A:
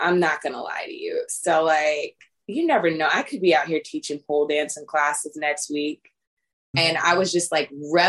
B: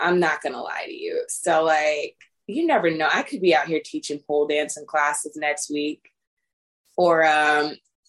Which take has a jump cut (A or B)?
A